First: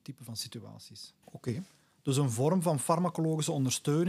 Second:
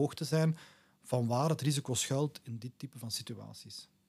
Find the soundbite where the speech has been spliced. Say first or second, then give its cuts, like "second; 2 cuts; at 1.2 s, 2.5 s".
first; 1 cut; at 1.2 s